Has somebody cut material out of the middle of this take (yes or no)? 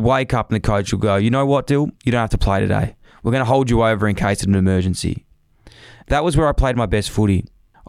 yes